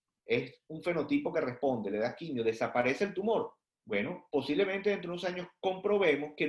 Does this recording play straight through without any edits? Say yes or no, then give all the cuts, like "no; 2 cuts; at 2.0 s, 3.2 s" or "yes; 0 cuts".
no; 1 cut; at 3.7 s